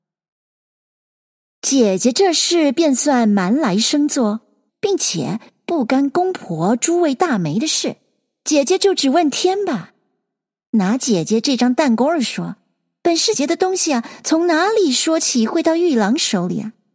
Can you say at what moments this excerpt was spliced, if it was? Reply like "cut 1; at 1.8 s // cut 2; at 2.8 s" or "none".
cut 1; at 4.7 s // cut 2; at 13.3 s